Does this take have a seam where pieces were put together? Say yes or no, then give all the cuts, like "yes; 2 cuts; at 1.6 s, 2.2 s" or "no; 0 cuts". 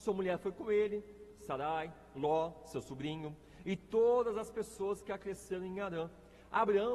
no; 0 cuts